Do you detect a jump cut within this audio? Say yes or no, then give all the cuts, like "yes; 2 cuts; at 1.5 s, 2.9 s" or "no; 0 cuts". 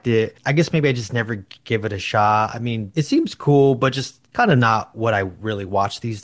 no; 0 cuts